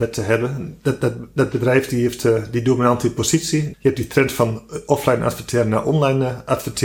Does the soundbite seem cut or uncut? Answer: cut